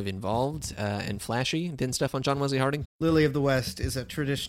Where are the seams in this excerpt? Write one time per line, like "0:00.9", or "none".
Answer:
0:02.8